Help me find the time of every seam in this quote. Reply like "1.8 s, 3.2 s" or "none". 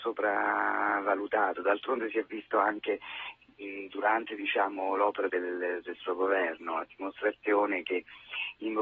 5.3 s